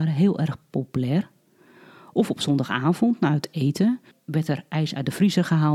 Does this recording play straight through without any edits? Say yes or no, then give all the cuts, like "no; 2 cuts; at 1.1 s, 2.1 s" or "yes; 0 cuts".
yes; 0 cuts